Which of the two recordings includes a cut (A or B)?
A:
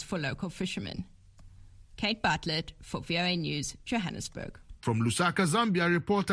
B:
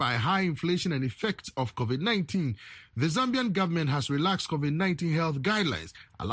A